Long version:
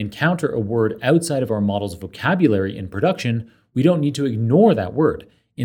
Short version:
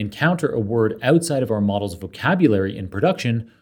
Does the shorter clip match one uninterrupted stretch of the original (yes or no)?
yes